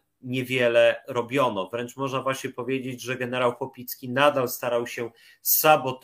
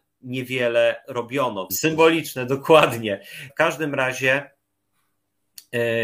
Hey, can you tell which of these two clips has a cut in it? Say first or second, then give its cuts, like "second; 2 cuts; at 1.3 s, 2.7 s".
second; 2 cuts; at 1.7 s, 3.5 s